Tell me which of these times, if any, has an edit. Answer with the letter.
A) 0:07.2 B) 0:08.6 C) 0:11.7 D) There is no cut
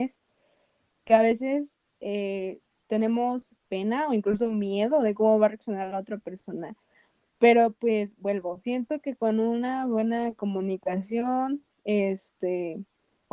D